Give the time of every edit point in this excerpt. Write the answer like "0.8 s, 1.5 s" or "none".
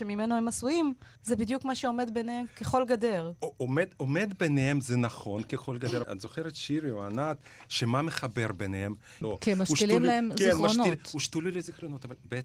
1.2 s, 6.0 s, 9.2 s